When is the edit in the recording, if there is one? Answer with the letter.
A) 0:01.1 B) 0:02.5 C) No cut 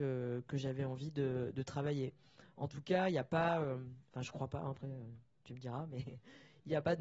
C